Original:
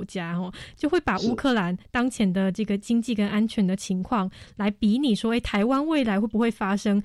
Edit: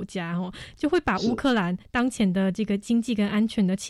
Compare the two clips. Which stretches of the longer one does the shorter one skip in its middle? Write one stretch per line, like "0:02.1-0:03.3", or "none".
none